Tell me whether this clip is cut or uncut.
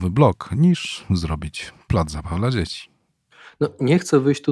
uncut